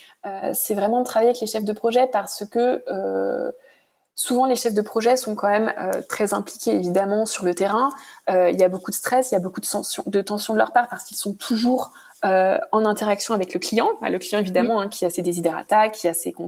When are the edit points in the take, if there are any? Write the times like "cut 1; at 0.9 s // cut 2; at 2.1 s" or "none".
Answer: none